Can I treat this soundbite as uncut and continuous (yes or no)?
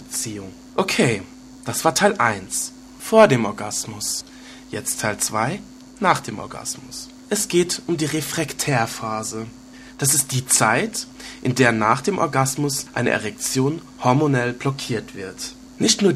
yes